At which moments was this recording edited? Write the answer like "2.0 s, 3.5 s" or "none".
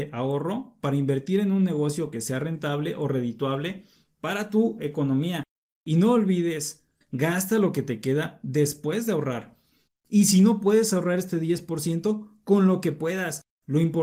7.0 s, 9.9 s